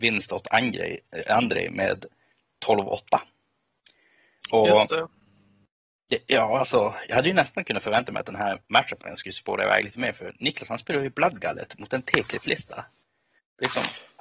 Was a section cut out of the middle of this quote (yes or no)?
no